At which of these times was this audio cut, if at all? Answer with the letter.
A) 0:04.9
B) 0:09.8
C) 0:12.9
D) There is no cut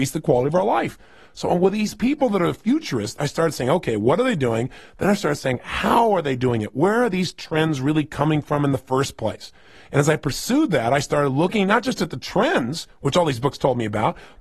D